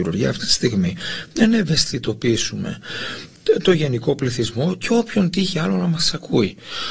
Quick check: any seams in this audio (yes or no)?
no